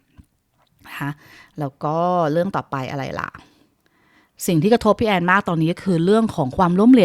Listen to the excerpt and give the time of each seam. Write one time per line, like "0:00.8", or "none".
none